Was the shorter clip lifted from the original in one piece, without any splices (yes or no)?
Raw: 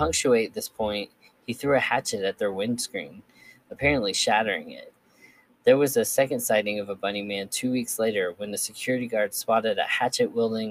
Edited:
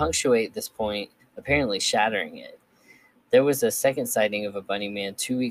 no